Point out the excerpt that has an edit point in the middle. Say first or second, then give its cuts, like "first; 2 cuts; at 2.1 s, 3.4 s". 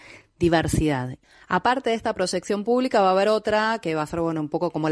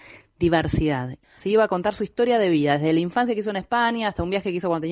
second; 1 cut; at 1.4 s